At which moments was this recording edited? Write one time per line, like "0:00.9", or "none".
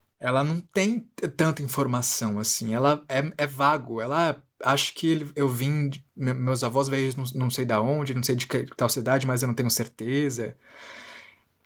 none